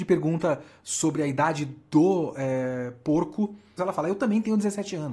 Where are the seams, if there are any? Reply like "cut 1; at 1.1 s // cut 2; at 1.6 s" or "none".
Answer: cut 1; at 3.8 s